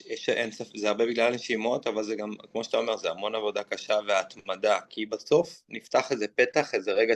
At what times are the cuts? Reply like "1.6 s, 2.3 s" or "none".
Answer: none